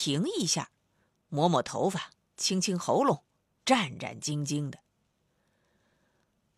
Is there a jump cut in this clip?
no; 0 cuts

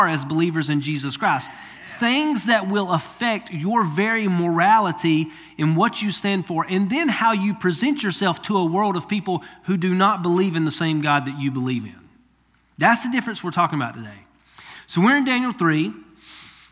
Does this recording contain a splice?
no; 0 cuts

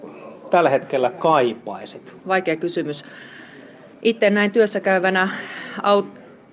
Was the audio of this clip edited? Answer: yes; 1 cut; at 2.2 s

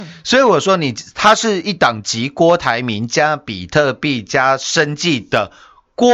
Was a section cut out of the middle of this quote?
no; 0 cuts

